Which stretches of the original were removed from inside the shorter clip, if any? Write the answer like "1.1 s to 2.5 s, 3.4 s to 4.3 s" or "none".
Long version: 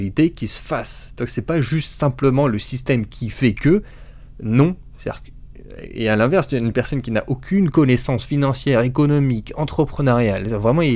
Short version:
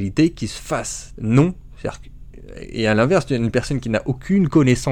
1.1 s to 4.4 s